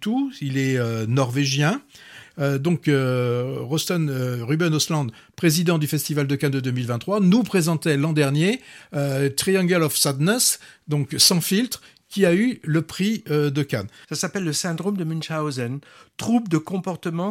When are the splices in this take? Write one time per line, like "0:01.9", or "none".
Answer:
0:02.2
0:14.0